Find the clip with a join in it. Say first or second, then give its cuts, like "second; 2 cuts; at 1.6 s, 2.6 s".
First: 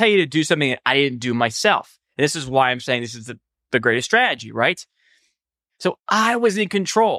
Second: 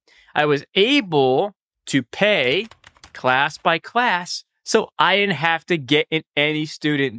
first; 1 cut; at 5.7 s